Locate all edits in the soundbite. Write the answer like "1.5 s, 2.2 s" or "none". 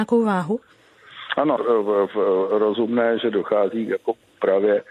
1.6 s